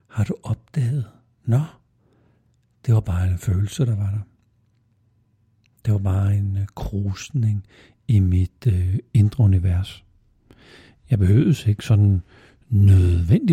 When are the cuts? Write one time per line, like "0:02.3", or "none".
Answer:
none

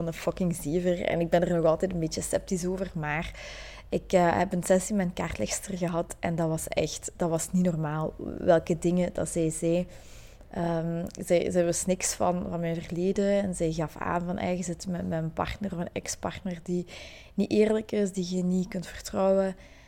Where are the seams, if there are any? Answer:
none

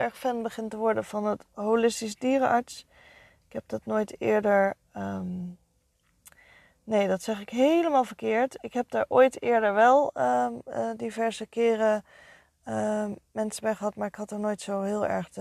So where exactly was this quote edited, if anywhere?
none

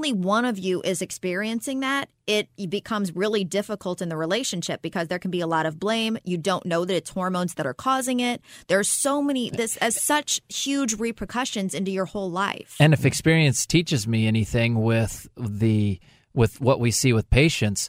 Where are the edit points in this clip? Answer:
none

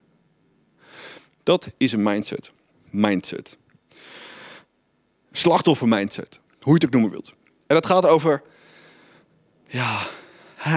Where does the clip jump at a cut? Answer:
0:02.7

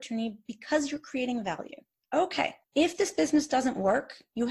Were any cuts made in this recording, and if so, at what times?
0:02.6

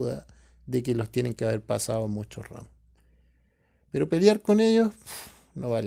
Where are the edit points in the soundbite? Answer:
none

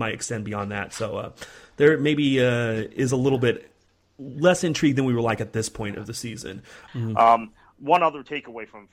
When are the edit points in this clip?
0:06.9

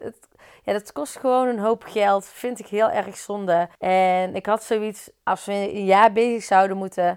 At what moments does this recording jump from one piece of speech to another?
0:03.7
0:05.3

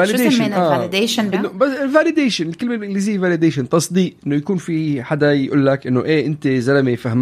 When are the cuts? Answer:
0:01.3

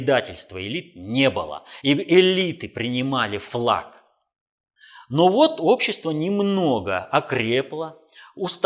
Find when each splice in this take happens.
none

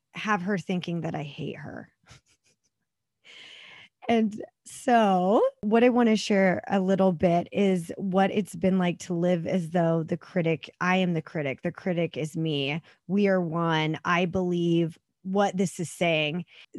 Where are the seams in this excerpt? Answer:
none

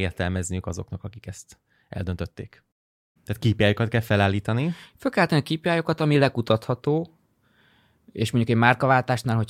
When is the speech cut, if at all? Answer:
0:03.2

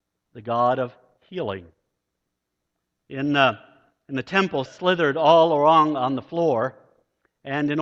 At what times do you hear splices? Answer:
0:04.7

